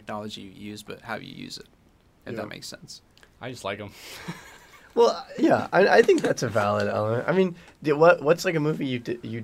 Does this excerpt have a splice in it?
no; 0 cuts

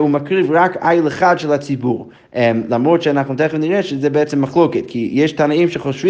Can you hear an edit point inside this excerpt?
no; 0 cuts

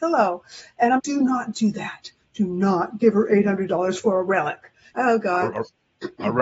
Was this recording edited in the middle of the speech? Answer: yes; 2 cuts; at 1.0 s, 4.9 s

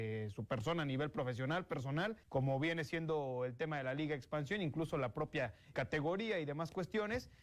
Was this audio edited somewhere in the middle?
yes; 2 cuts; at 2.2 s, 5.7 s

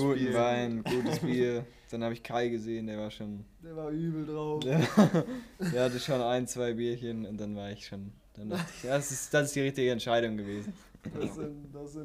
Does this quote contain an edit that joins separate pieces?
no; 0 cuts

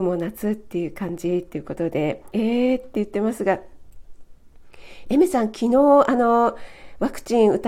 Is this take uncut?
no; 1 cut; at 2.3 s

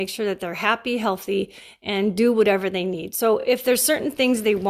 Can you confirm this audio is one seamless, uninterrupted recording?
yes; 0 cuts

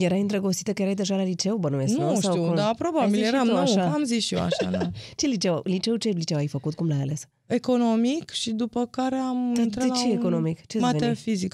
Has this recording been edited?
no; 0 cuts

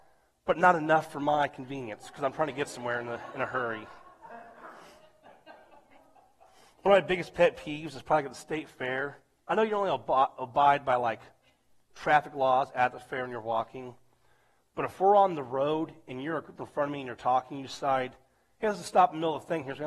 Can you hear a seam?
no; 0 cuts

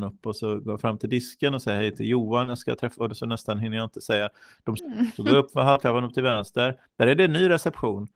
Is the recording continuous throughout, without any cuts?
no; 1 cut; at 4.8 s

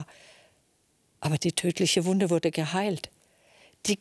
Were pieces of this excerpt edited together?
no; 0 cuts

